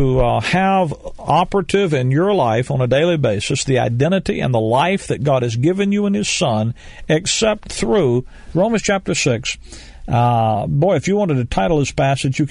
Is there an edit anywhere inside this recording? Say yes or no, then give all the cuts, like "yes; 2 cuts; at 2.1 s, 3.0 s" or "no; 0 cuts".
yes; 1 cut; at 8.5 s